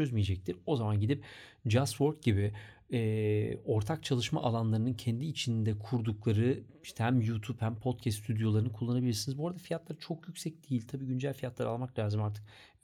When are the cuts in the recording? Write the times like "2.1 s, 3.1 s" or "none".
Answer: none